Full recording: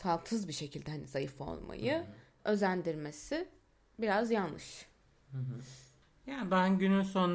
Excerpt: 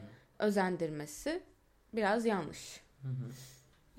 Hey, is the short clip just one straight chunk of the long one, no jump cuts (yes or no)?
no